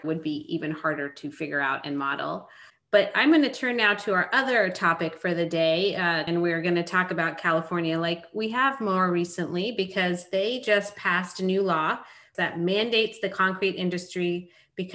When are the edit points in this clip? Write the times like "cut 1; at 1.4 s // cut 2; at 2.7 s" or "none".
cut 1; at 6.3 s // cut 2; at 12.3 s